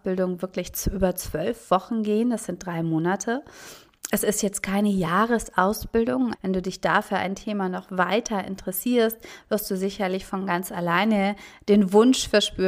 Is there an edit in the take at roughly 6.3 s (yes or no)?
yes